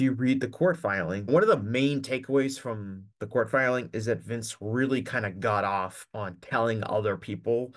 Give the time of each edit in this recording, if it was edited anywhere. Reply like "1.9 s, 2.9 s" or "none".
1.3 s